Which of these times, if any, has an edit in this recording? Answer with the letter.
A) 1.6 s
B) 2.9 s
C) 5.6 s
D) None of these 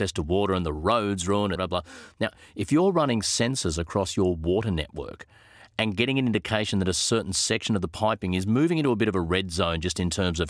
A